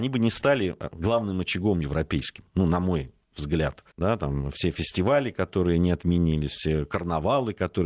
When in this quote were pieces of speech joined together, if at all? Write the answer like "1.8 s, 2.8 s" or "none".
3.9 s